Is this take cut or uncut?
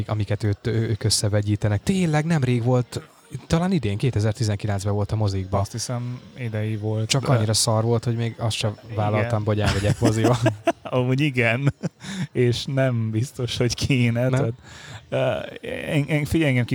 cut